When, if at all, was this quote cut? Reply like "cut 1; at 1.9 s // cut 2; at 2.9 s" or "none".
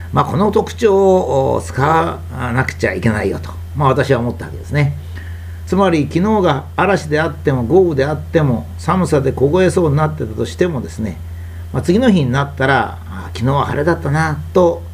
cut 1; at 5.6 s